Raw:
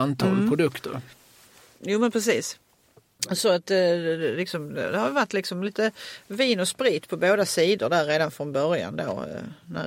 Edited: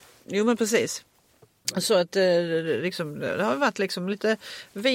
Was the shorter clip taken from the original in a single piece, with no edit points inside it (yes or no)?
yes